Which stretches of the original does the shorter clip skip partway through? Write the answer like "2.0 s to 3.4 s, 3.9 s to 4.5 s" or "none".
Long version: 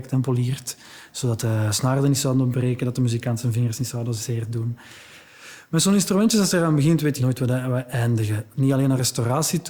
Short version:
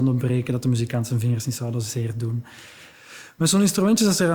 none

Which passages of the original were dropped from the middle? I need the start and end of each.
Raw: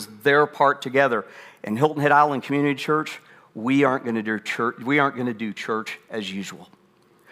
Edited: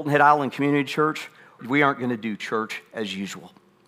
3.5 s to 4.8 s

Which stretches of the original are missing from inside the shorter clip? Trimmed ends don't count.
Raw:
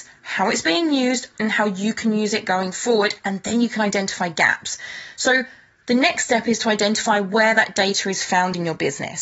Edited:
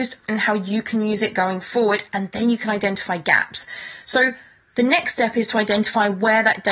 none

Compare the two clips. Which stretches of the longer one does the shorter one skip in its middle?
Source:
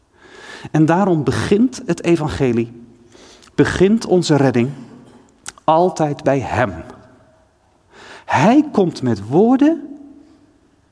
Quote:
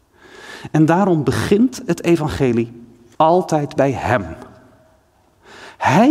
3.1 s to 5.6 s

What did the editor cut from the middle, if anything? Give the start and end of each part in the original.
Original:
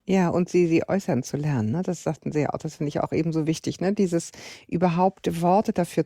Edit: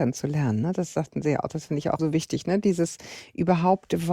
3.1 s to 3.3 s

